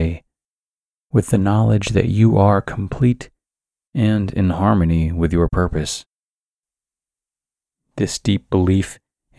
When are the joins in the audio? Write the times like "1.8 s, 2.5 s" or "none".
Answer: 3.9 s